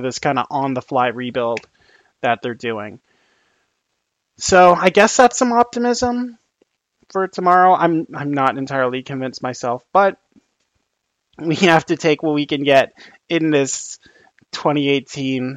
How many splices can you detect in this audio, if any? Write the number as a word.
zero